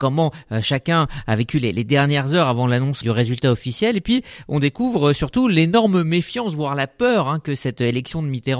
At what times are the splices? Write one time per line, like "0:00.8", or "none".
0:03.0